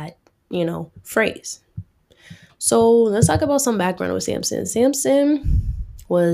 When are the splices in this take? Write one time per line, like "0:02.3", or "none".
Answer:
none